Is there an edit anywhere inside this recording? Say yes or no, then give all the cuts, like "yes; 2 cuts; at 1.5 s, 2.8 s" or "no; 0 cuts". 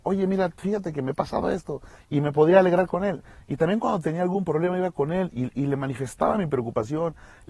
no; 0 cuts